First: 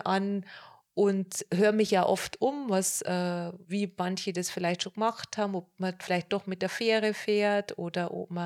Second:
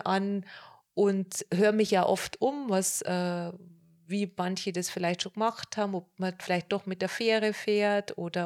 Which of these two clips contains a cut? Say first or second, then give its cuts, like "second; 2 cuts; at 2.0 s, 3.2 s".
first; 1 cut; at 3.6 s